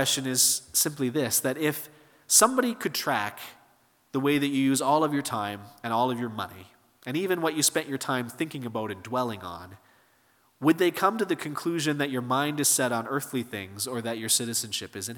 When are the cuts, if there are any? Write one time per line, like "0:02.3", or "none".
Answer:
none